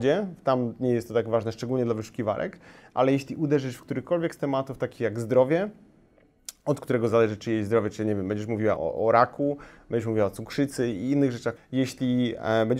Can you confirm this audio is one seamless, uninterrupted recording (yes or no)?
no